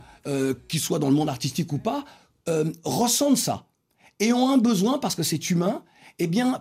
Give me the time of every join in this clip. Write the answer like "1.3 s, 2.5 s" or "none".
none